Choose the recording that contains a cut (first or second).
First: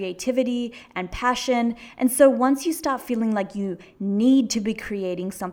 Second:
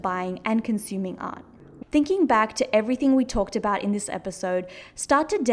second